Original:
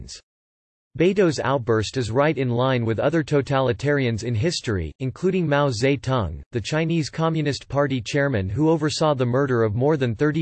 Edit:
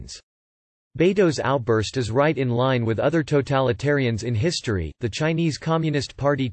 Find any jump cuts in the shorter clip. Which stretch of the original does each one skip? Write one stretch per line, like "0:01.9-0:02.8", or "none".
0:05.0-0:06.5